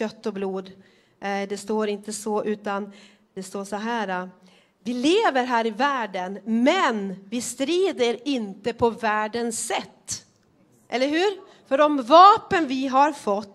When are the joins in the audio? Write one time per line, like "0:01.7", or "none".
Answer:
none